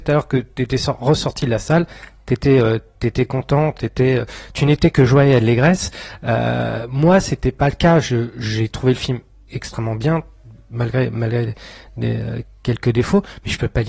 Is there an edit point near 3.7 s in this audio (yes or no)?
no